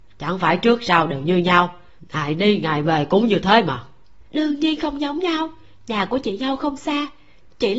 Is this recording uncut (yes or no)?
no